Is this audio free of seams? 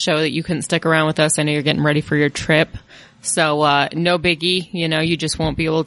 yes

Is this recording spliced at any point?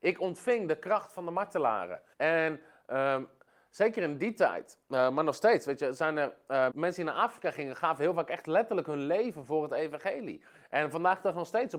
yes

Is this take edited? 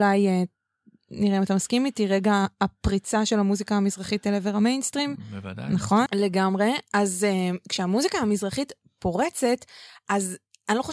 yes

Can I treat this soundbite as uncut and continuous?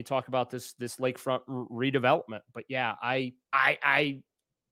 no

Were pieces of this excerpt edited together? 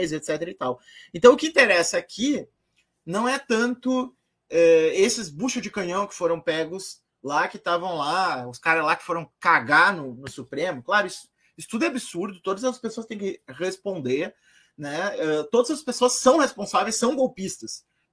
no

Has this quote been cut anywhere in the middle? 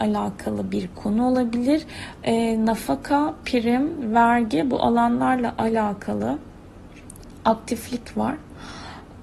no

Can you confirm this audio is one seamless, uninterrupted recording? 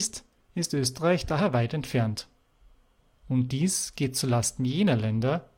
yes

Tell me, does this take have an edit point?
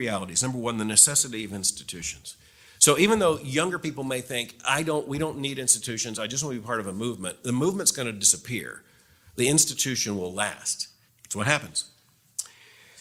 yes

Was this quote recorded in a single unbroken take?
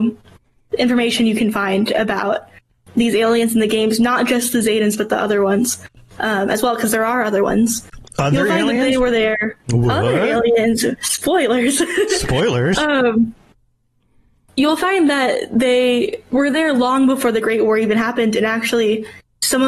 yes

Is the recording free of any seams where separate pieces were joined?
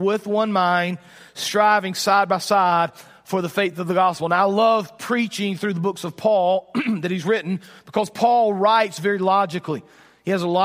yes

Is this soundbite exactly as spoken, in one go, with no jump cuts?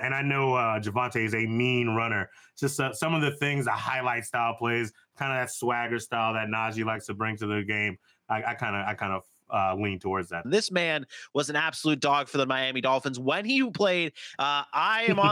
no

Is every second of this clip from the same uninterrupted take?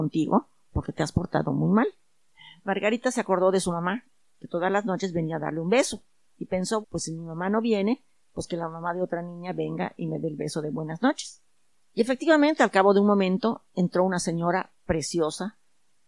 no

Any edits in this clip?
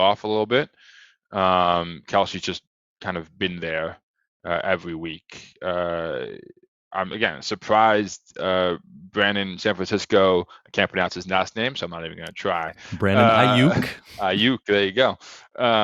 no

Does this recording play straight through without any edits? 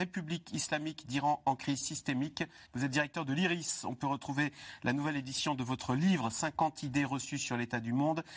no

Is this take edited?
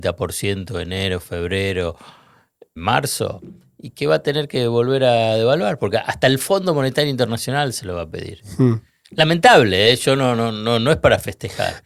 yes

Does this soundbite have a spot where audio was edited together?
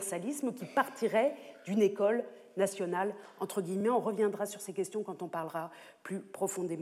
no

